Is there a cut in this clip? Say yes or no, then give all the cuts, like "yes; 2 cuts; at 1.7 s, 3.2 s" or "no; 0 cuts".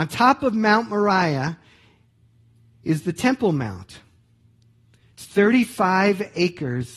no; 0 cuts